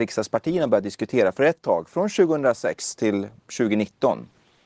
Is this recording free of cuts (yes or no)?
yes